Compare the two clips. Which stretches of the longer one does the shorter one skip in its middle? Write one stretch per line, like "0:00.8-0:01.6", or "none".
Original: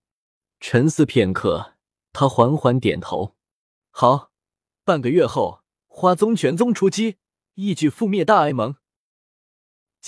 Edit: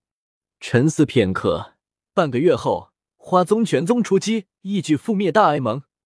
0:02.1-0:04.8
0:07.3-0:07.5